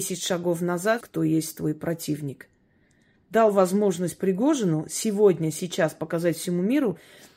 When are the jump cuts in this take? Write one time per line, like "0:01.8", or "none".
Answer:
0:01.0
0:03.3

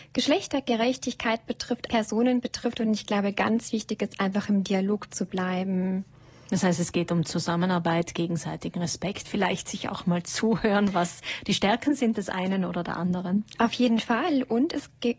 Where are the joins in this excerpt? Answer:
0:01.9

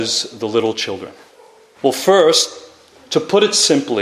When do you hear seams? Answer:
0:01.8

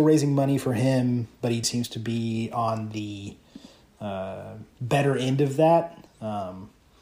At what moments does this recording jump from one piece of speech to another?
0:01.6
0:04.7
0:06.1

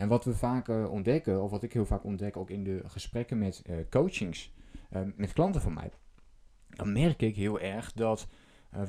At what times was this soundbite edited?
0:05.2

